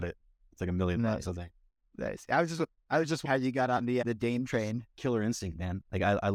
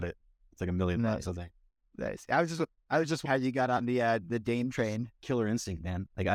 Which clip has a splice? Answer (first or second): first